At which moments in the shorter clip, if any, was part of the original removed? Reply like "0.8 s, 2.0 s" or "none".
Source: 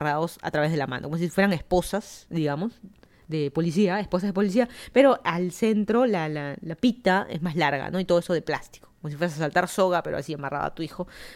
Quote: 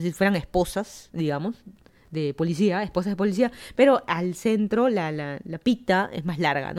none